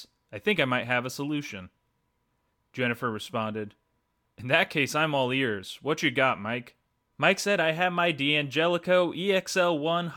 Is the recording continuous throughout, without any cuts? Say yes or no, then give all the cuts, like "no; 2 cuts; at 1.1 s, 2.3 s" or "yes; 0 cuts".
yes; 0 cuts